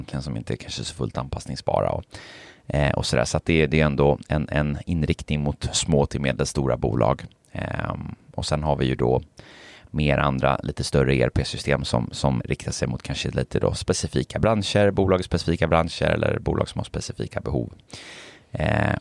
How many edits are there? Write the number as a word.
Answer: one